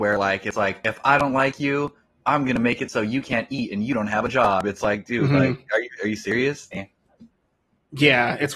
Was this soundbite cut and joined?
yes; 1 cut; at 6.7 s

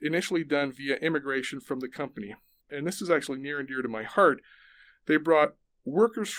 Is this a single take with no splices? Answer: yes; 0 cuts

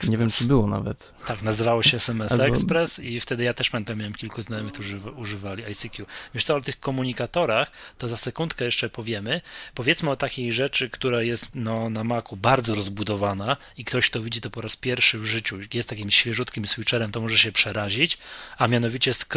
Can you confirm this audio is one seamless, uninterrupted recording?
yes; 0 cuts

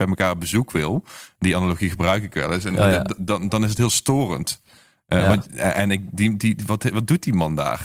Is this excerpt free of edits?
yes; 0 cuts

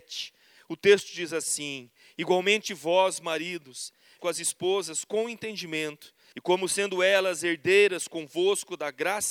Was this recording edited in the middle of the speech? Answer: yes; 2 cuts; at 4.2 s, 6.3 s

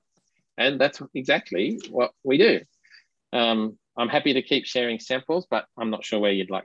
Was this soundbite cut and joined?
yes; 1 cut; at 3.8 s

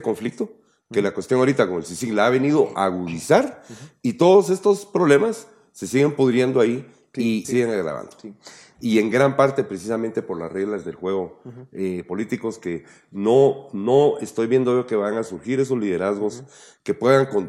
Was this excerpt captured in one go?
no; 2 cuts; at 7.4 s, 8.7 s

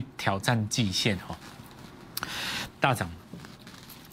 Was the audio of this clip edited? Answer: yes; 1 cut; at 2.7 s

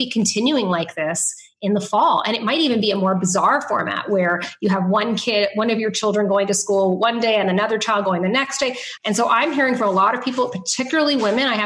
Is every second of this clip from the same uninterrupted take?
no; 1 cut; at 9.0 s

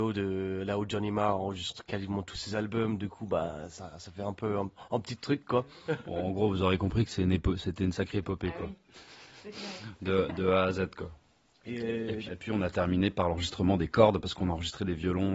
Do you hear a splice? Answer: yes; 1 cut; at 12.3 s

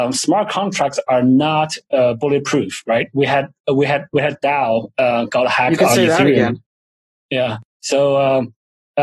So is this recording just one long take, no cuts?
yes; 0 cuts

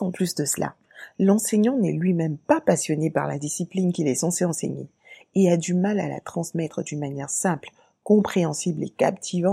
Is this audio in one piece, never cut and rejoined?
yes; 0 cuts

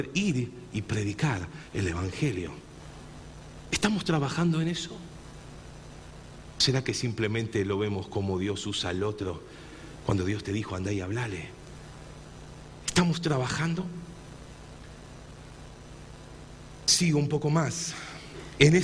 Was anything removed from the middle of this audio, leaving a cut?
no; 0 cuts

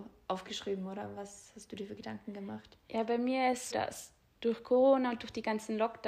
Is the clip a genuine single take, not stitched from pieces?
no; 1 cut; at 3.7 s

